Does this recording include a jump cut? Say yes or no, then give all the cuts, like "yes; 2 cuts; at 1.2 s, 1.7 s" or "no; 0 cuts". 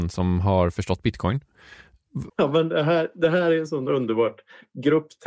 yes; 1 cut; at 2.3 s